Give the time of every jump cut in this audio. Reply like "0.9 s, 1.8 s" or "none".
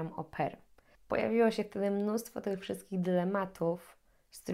1.0 s